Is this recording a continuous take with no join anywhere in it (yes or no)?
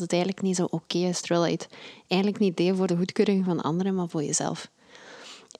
yes